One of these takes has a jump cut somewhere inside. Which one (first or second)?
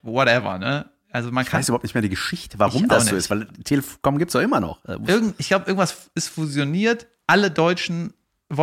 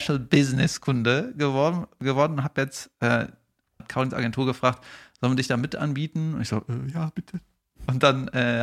second